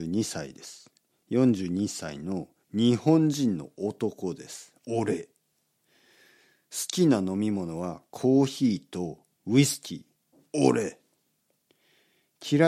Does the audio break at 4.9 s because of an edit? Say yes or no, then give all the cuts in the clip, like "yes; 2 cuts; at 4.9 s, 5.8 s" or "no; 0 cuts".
no; 0 cuts